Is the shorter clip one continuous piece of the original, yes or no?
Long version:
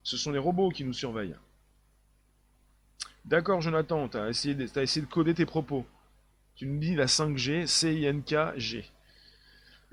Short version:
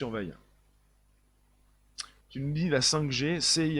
no